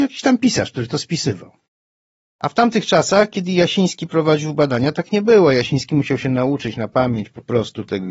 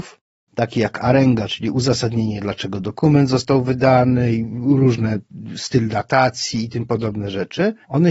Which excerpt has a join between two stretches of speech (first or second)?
first